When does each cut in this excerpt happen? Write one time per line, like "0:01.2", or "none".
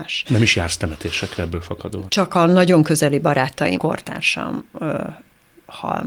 0:02.1
0:03.8